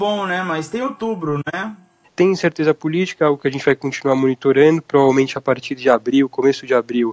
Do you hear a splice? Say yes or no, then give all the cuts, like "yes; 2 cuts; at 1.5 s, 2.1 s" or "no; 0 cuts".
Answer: yes; 1 cut; at 2.0 s